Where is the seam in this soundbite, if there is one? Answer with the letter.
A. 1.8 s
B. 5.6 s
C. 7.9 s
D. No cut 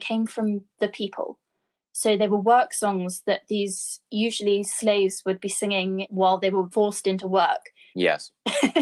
C